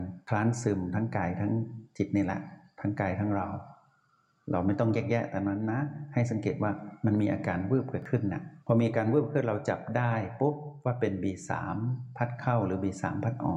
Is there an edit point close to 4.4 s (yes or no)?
no